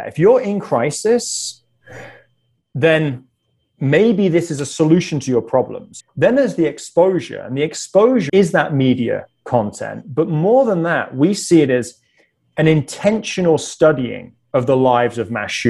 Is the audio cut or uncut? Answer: cut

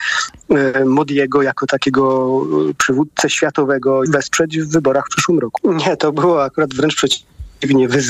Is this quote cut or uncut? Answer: cut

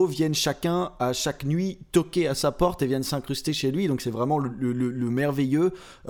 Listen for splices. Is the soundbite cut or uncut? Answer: uncut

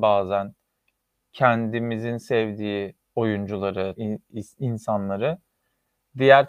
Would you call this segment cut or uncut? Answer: cut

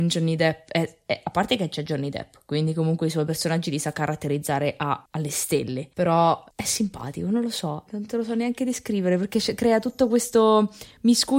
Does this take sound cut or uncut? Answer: cut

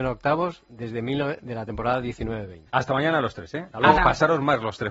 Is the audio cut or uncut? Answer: cut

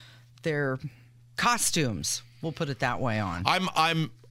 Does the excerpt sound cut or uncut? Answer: uncut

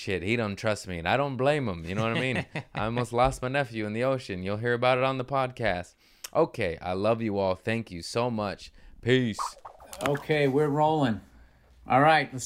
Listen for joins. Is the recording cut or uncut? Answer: uncut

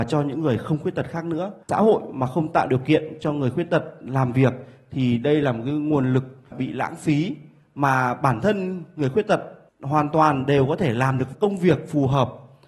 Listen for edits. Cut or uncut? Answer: cut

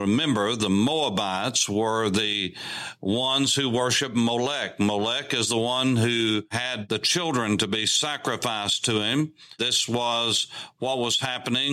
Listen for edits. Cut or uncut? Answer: uncut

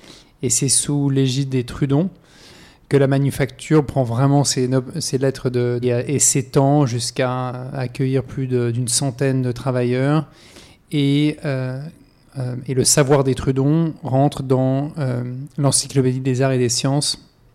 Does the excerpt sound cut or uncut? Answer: cut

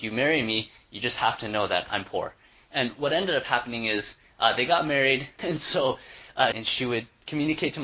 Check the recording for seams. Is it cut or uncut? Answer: cut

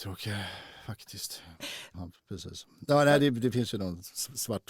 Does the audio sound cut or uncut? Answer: cut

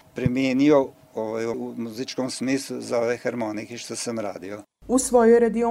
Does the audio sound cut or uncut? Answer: cut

